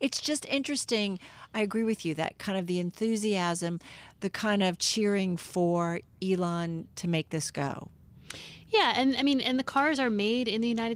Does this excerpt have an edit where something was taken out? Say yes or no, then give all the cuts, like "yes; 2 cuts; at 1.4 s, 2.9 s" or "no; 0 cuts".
no; 0 cuts